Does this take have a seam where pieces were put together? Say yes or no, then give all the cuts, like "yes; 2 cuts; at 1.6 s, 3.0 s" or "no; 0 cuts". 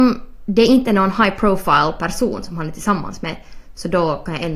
no; 0 cuts